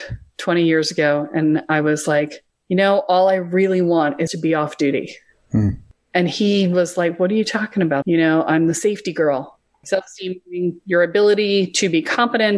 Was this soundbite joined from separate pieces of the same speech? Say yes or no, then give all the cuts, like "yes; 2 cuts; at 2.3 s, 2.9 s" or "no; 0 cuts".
yes; 3 cuts; at 4.3 s, 8.0 s, 9.8 s